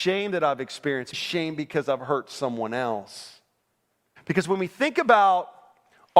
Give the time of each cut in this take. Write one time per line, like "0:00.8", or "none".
0:01.1
0:04.2